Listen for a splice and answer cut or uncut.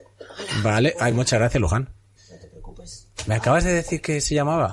uncut